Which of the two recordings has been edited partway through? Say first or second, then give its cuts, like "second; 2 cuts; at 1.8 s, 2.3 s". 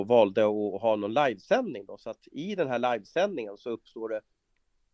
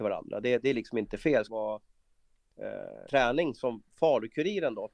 second; 2 cuts; at 1.5 s, 3.1 s